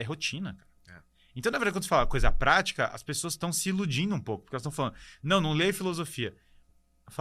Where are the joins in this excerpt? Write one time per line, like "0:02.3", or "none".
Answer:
none

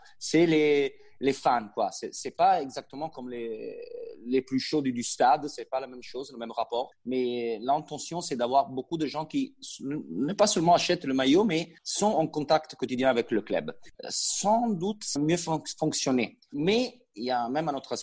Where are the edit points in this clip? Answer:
0:15.2
0:16.5

